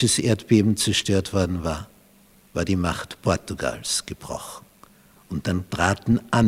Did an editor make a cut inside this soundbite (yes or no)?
no